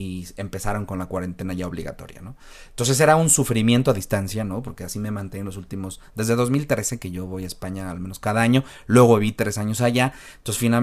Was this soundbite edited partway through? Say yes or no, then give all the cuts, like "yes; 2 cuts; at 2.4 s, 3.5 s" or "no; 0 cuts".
no; 0 cuts